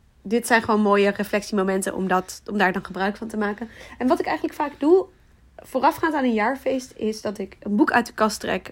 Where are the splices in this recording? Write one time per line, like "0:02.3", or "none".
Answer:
none